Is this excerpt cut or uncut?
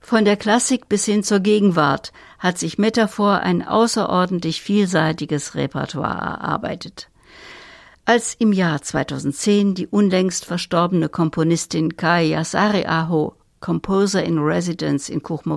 uncut